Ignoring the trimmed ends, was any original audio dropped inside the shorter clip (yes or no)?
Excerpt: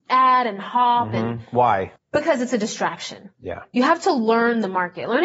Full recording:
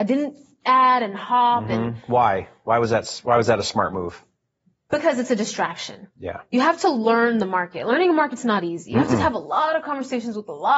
yes